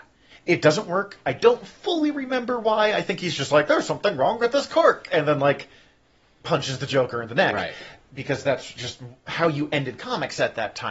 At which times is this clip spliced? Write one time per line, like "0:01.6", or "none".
none